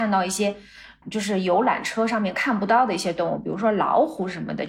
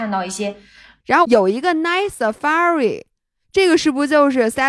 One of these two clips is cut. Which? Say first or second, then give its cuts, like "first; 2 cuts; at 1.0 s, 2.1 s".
second; 1 cut; at 1.0 s